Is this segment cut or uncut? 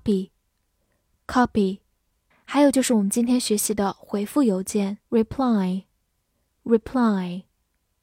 cut